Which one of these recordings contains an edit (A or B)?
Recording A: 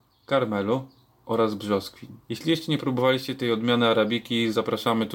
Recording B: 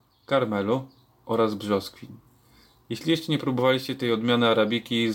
A